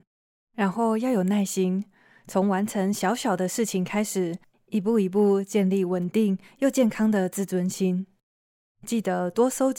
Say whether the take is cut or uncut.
cut